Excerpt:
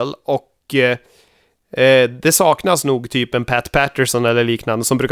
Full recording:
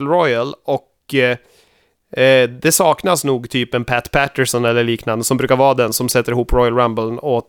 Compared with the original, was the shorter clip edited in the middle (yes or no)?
no